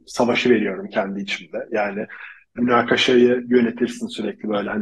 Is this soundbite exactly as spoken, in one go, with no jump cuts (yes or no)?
no